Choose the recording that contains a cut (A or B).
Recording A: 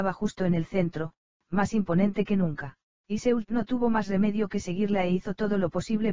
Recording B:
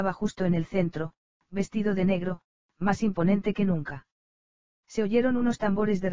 A